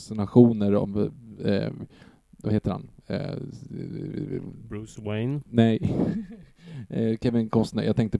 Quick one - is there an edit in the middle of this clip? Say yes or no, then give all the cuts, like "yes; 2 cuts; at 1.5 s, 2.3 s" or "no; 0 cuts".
no; 0 cuts